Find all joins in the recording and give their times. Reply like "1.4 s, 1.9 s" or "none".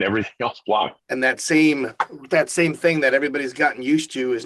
1.0 s

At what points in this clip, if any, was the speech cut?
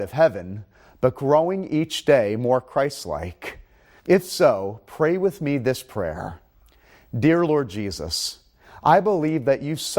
4.0 s

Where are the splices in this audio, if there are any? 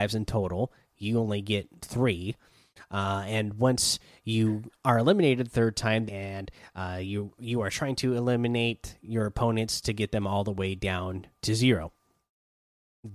6.1 s, 11.4 s

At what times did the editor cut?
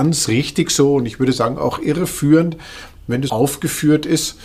3.3 s

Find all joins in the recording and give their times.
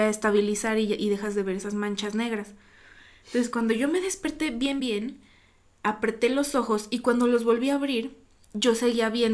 4.8 s

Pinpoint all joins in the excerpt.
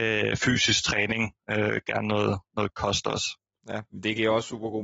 3.5 s

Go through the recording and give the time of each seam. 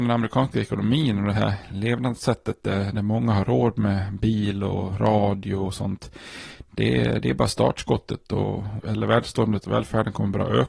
8.8 s

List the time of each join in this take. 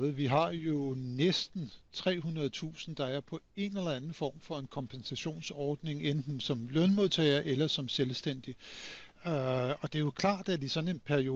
none

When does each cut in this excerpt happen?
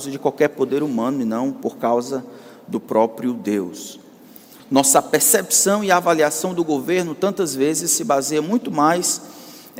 4.6 s

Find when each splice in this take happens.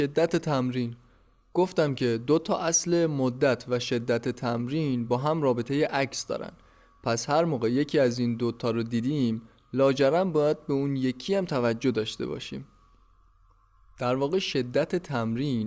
none

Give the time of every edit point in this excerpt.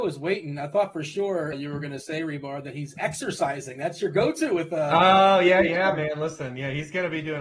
1.5 s

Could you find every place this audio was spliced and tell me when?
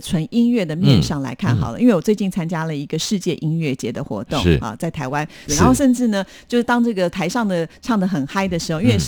5.5 s

